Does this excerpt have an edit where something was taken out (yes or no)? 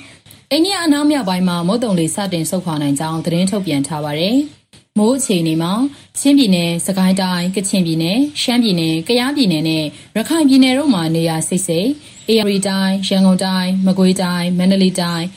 yes